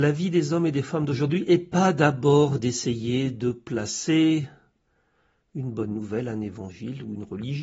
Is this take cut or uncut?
uncut